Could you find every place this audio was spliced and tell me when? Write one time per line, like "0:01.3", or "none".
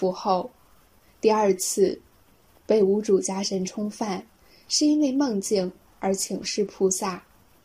0:01.0

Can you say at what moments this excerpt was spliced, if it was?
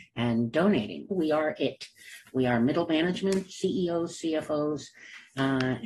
0:01.1

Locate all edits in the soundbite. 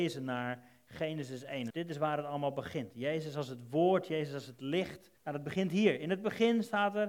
0:01.7
0:05.2

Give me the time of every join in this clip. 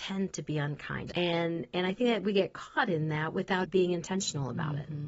0:01.1
0:03.6

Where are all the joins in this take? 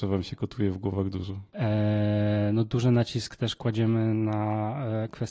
0:01.5

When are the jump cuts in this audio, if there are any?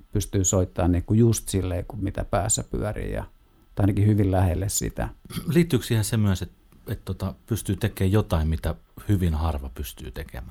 none

